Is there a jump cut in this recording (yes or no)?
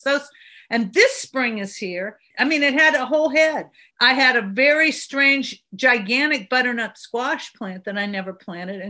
yes